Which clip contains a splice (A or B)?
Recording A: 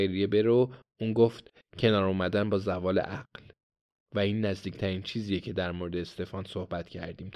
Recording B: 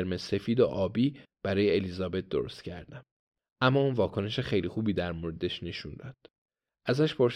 B